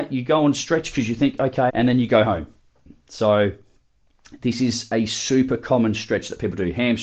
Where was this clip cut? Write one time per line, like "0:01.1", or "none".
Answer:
0:01.7